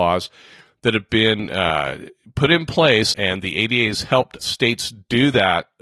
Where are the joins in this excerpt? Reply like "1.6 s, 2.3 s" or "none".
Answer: 3.1 s, 4.4 s

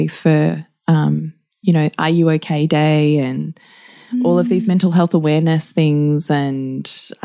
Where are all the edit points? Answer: none

